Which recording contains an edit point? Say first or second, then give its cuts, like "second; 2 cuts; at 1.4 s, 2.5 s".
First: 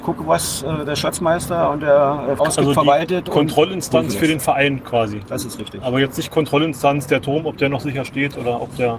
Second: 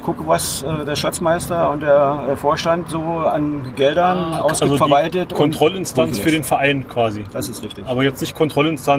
first; 1 cut; at 2.4 s